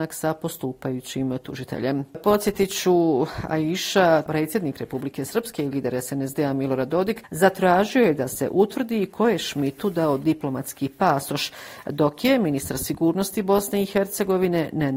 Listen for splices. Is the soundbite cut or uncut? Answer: cut